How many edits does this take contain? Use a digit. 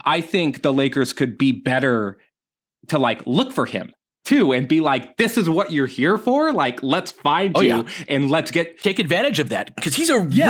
0